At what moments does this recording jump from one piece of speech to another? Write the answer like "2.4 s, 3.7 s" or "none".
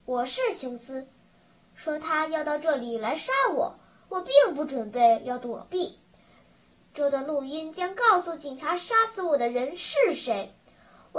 1.6 s, 6.4 s